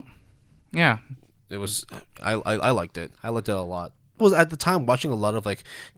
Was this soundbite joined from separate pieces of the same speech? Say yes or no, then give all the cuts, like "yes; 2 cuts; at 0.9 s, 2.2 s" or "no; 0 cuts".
yes; 2 cuts; at 3.1 s, 4.2 s